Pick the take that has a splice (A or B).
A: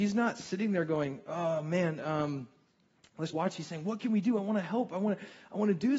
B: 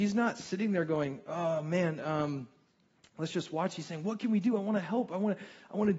A